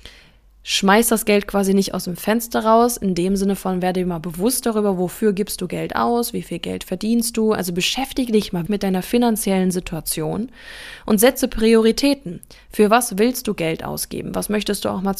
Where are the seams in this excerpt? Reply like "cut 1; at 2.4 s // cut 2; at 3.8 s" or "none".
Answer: cut 1; at 8.7 s